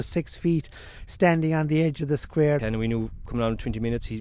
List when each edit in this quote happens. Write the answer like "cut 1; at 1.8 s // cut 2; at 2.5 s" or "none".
cut 1; at 2.6 s